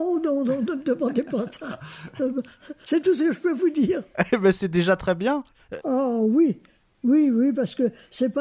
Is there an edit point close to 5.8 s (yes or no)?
yes